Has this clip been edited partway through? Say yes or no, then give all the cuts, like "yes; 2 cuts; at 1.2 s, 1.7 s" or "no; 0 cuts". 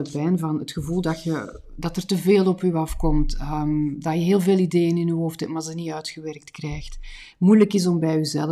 no; 0 cuts